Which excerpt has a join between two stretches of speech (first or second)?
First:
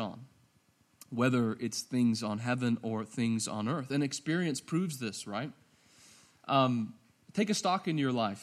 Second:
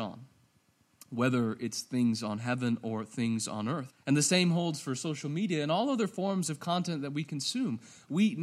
second